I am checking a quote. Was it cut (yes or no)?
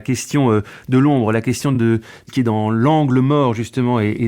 no